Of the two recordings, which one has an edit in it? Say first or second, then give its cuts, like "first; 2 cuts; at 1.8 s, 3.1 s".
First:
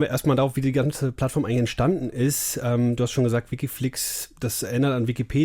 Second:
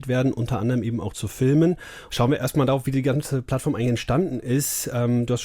second; 1 cut; at 2.1 s